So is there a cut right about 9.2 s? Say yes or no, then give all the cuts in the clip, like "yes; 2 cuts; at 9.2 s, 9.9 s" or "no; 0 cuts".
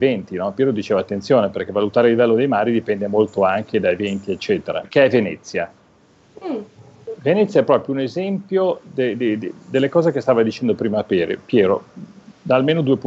yes; 2 cuts; at 4.8 s, 9.2 s